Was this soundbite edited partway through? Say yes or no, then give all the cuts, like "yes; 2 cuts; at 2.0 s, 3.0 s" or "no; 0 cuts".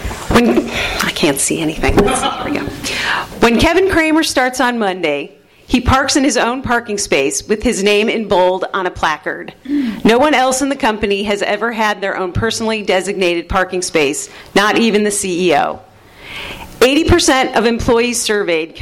no; 0 cuts